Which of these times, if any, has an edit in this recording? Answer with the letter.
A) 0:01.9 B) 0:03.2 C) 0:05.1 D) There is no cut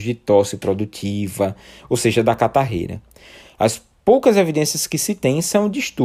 D